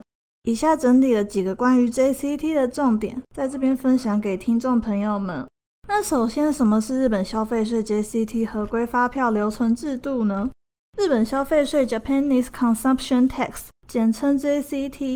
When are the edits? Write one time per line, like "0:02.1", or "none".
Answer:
none

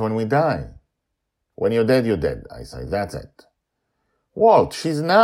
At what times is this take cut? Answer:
none

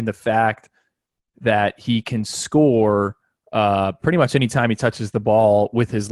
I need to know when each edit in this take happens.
none

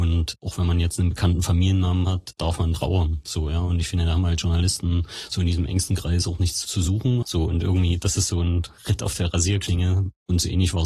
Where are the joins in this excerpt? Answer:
0:07.2

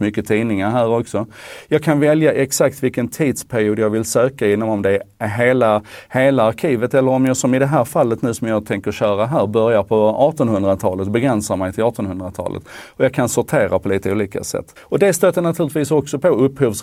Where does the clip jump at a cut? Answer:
0:14.8

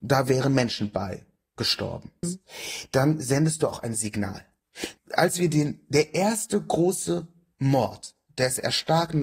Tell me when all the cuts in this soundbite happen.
0:02.2
0:05.0

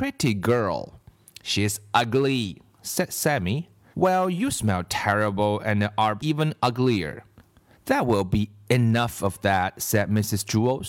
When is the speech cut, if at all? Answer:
0:03.9
0:06.2
0:07.7

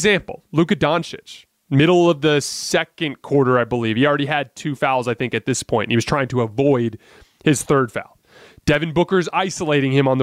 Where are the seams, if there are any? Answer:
none

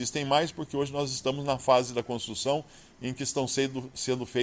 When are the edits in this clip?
none

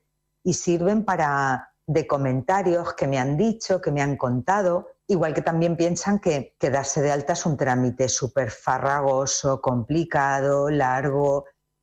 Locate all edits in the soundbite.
0:01.8
0:05.0
0:06.6

